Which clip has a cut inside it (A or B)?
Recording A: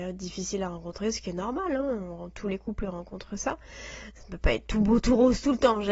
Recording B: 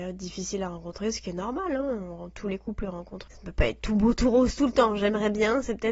B